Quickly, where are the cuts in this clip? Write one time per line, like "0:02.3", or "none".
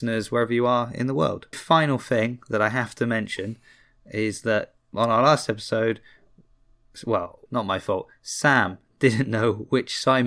0:01.5
0:07.5